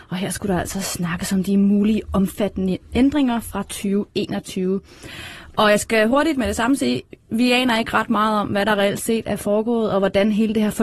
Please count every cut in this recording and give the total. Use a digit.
0